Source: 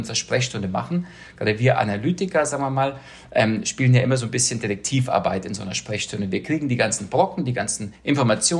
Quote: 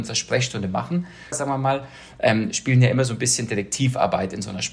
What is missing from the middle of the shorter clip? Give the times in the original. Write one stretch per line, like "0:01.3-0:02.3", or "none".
0:01.3-0:02.4